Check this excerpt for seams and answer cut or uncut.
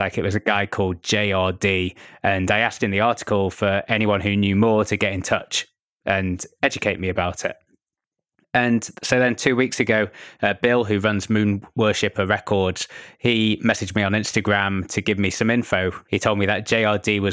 cut